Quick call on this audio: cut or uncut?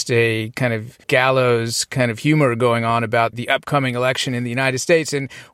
cut